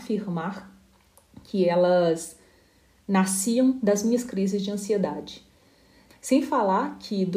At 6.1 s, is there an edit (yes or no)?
yes